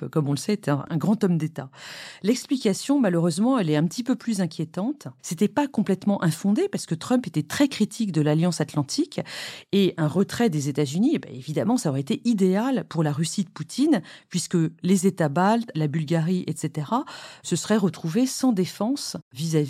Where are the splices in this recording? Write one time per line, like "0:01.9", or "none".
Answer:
0:05.2
0:15.7